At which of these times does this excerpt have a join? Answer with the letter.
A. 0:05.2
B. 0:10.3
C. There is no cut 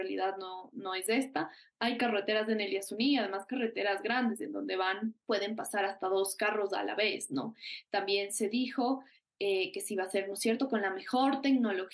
A